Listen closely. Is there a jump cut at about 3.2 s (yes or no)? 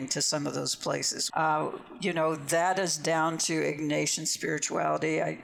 no